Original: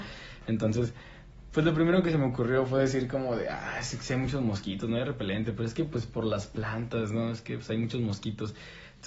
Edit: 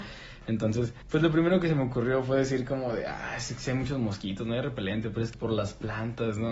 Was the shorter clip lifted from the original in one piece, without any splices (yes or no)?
no